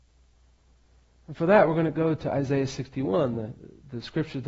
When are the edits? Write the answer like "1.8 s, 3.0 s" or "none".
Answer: none